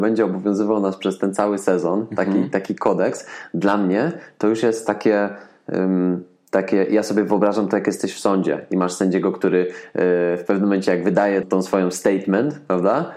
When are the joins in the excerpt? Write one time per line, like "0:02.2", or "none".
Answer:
0:11.4